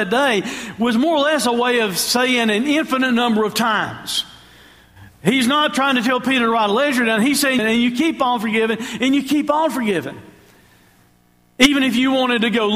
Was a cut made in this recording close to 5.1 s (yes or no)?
no